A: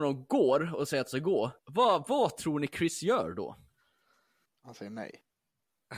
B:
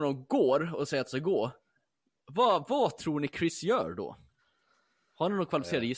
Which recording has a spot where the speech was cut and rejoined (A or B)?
A